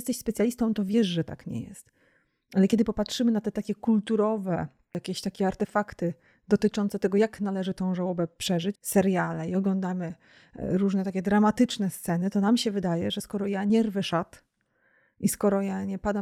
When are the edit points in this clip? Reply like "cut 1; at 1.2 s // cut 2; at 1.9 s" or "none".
cut 1; at 8.8 s